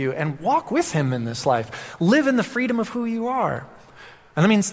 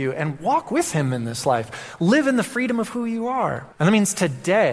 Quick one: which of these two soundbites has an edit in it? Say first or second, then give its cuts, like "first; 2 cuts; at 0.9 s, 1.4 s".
second; 1 cut; at 3.7 s